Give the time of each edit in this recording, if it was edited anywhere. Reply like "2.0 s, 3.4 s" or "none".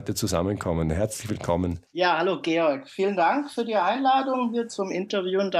1.9 s